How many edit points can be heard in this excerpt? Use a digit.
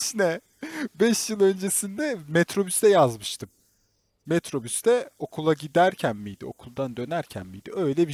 0